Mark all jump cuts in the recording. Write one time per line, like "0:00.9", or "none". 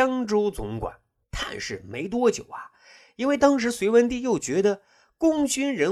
0:01.2